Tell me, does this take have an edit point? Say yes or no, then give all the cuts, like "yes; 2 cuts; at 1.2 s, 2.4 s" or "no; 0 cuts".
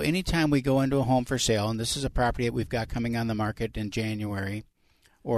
no; 0 cuts